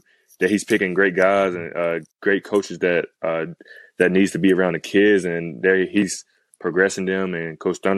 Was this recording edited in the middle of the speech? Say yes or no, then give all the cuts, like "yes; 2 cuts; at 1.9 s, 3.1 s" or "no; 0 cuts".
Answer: yes; 1 cut; at 2.1 s